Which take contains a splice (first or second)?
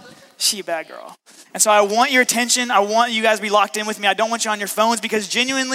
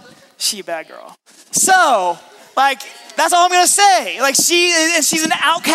first